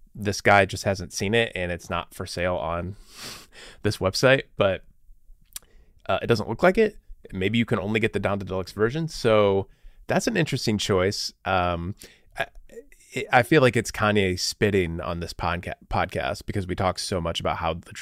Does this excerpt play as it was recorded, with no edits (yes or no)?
yes